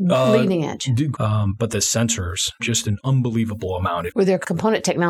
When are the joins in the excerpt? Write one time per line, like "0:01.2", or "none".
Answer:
0:01.1
0:02.6
0:04.1